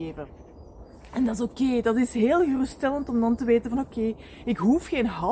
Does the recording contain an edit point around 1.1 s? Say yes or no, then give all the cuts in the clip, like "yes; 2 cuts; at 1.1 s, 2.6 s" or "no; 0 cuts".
no; 0 cuts